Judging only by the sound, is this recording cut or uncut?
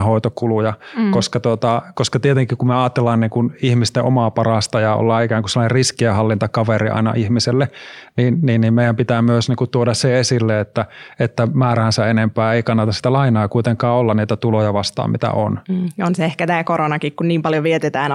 uncut